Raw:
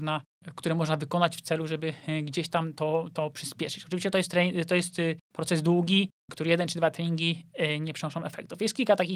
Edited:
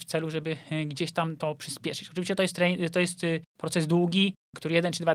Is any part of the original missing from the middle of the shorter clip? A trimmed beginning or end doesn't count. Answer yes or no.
yes